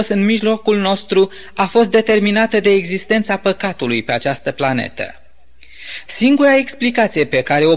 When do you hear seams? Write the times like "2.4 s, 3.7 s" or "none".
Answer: 6.1 s